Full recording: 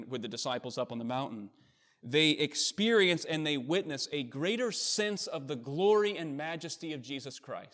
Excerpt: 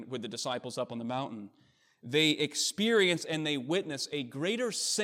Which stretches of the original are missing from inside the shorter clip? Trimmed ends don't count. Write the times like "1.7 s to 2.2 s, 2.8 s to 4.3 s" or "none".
none